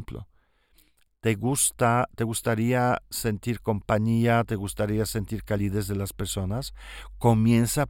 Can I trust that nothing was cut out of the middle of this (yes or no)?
yes